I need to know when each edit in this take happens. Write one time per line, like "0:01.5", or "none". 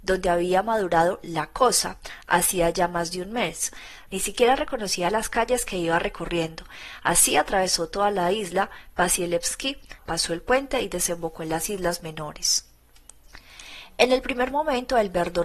0:04.1
0:10.0